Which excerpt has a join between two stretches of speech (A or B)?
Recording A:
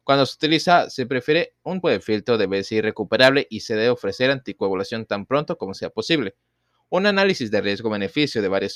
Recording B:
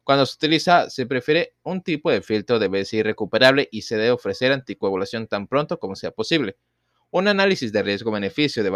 A